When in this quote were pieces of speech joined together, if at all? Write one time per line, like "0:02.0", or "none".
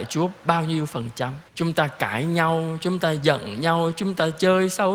0:01.5